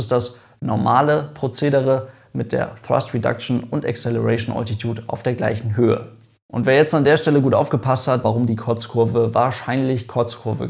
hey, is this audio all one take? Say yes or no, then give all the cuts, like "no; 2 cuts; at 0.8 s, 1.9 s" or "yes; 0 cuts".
no; 1 cut; at 8.2 s